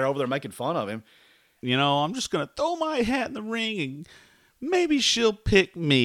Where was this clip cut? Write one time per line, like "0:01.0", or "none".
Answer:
0:01.6